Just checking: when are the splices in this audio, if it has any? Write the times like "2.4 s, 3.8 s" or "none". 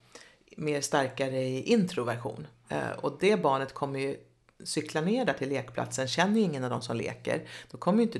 none